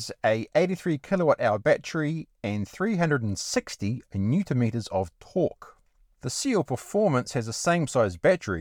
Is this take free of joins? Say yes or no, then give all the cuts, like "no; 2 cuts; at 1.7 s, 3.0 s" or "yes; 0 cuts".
yes; 0 cuts